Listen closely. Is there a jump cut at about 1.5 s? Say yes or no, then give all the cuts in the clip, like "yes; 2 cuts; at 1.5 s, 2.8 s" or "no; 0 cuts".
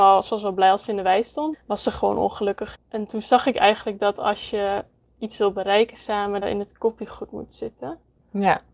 yes; 3 cuts; at 1.5 s, 2.7 s, 6.4 s